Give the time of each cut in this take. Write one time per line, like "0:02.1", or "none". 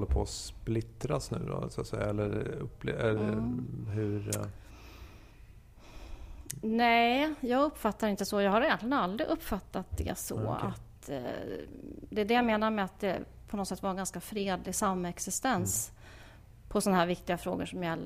none